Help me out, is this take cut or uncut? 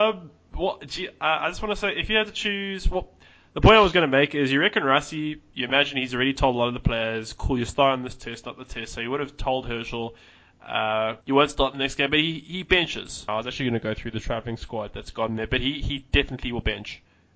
cut